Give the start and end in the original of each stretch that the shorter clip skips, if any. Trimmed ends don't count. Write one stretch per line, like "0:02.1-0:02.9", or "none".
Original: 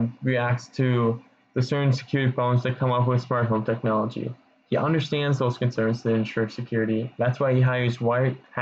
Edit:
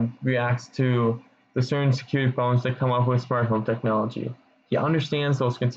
none